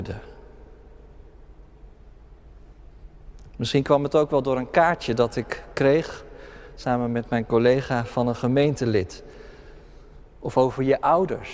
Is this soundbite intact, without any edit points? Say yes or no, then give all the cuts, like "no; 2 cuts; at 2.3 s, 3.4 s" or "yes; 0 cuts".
no; 2 cuts; at 3.5 s, 10.3 s